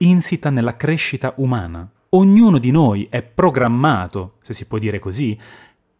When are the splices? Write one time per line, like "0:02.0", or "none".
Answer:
none